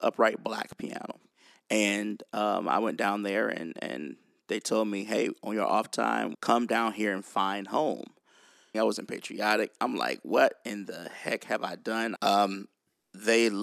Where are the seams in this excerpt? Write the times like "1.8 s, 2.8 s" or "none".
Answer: 6.3 s, 8.7 s, 12.2 s